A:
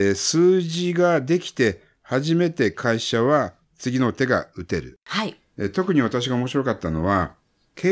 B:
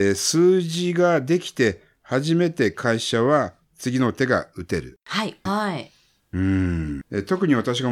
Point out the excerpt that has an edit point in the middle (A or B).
B